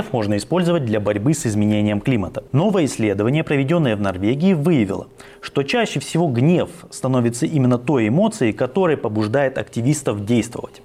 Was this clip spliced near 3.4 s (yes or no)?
no